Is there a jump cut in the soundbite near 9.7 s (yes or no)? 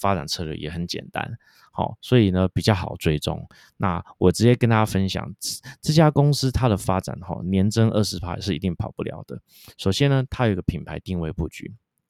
no